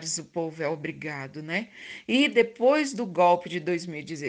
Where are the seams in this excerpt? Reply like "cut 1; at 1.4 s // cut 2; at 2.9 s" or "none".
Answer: cut 1; at 2.0 s